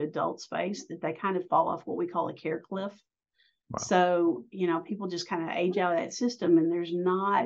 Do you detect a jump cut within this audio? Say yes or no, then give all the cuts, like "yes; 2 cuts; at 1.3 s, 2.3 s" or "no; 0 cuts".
no; 0 cuts